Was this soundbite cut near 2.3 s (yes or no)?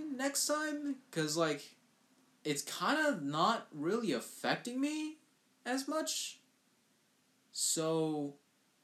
yes